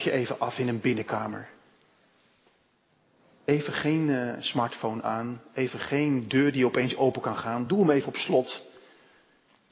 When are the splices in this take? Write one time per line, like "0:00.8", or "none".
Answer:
none

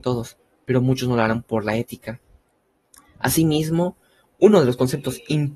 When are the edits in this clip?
none

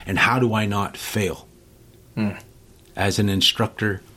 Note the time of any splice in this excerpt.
none

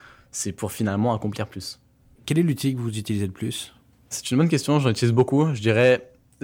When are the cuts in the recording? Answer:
0:02.2
0:04.1

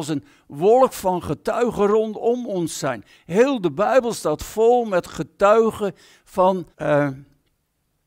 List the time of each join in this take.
0:06.7

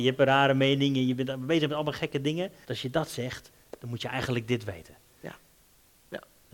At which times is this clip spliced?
0:02.6

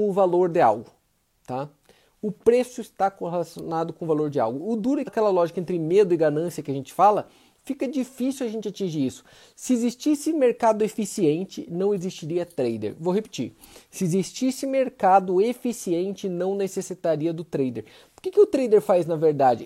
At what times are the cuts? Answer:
0:05.1

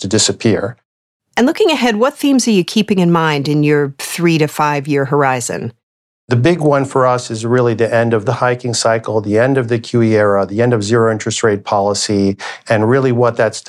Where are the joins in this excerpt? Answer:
none

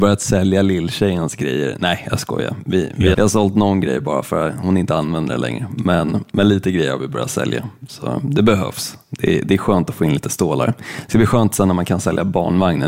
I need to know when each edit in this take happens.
0:03.1

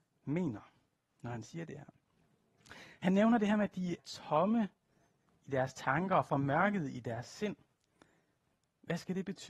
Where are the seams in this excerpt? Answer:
0:04.0

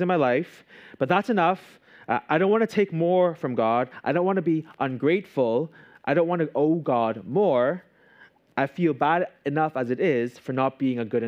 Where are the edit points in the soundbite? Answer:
none

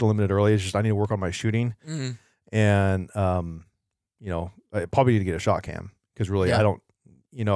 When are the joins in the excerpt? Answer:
none

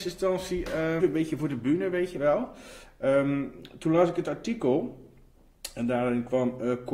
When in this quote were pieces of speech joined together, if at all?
0:01.0

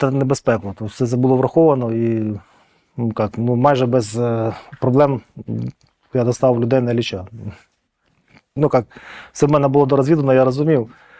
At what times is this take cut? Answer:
0:08.6

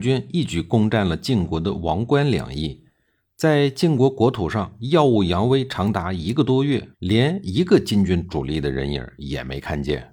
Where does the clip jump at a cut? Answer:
0:06.9

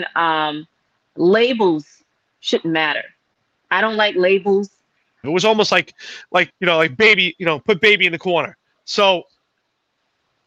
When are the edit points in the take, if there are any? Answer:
0:05.2
0:06.5

